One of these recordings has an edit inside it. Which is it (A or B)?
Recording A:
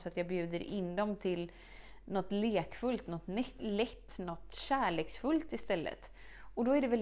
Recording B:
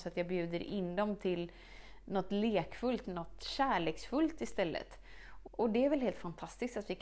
B